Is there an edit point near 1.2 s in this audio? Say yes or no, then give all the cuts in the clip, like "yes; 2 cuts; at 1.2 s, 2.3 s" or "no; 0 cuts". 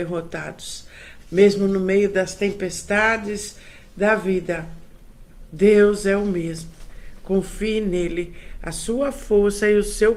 yes; 1 cut; at 1.2 s